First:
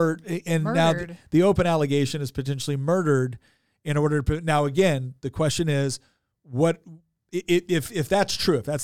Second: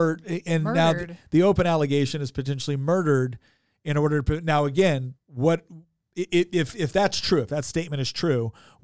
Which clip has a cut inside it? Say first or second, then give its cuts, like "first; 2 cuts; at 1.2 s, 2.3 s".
second; 1 cut; at 5.2 s